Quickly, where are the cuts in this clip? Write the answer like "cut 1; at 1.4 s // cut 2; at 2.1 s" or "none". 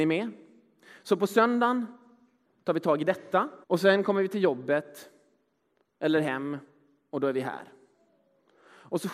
cut 1; at 3.6 s